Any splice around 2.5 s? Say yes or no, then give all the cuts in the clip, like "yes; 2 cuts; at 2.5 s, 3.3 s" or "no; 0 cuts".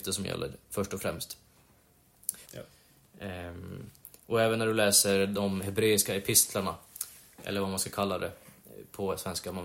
yes; 1 cut; at 2.5 s